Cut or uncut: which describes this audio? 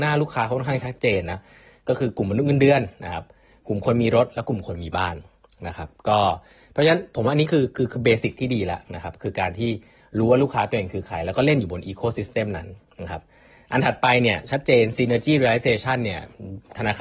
uncut